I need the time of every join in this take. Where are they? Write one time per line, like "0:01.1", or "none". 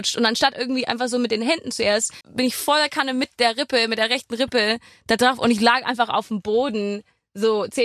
0:02.2